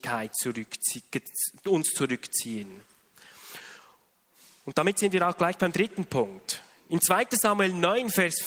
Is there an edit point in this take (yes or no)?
no